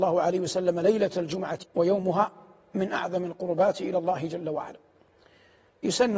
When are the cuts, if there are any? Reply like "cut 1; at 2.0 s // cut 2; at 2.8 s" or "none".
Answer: cut 1; at 1.6 s